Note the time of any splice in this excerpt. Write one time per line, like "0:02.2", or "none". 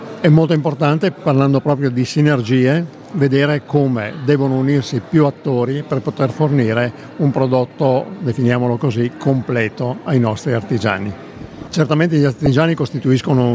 0:11.7